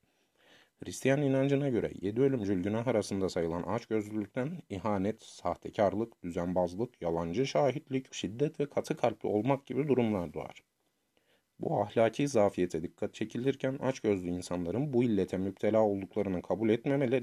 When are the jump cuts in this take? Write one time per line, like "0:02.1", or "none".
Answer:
0:08.1